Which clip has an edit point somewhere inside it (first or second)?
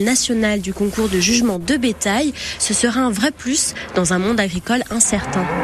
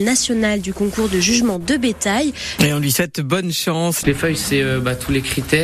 second